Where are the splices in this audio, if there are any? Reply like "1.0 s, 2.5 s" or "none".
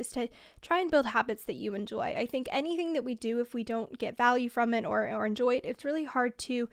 none